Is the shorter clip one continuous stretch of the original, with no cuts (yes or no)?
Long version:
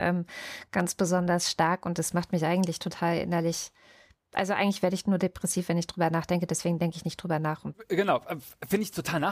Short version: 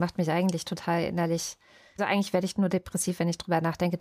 no